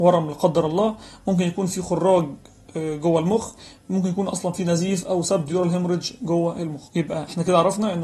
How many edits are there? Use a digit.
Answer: 1